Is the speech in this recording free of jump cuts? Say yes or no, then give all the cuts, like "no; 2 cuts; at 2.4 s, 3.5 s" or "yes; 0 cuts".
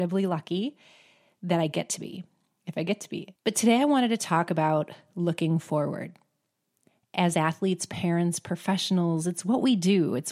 no; 1 cut; at 3.3 s